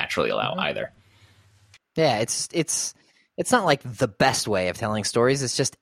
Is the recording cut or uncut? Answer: uncut